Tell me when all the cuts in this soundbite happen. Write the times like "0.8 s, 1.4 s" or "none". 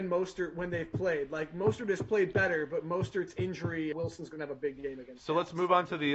3.9 s